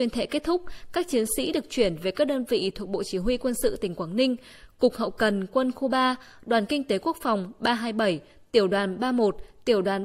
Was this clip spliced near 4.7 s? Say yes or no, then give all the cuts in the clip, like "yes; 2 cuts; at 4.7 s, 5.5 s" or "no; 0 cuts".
no; 0 cuts